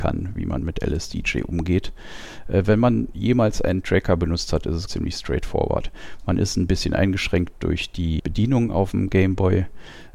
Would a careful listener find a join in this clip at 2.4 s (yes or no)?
no